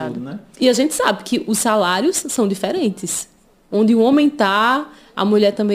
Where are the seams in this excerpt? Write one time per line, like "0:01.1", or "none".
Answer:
none